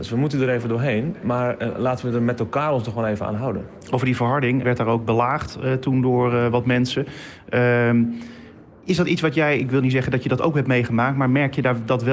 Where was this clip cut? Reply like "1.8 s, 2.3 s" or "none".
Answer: 4.6 s